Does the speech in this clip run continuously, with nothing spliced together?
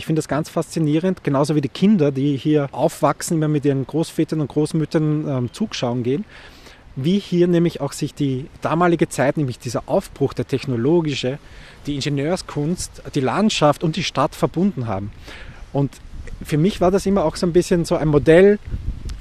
yes; 0 cuts

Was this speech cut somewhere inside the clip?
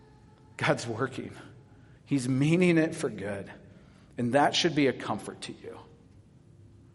no; 0 cuts

